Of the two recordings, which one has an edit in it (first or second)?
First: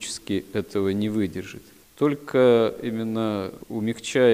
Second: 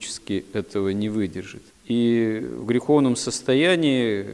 second